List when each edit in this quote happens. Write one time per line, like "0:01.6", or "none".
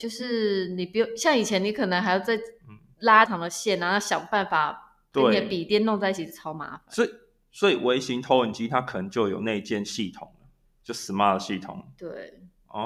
0:03.3